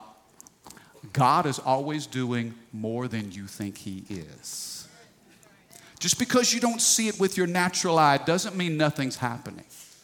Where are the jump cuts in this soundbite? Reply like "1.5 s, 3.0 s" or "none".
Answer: none